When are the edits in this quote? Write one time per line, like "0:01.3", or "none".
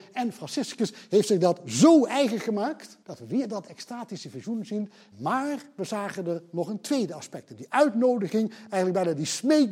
0:03.0
0:05.1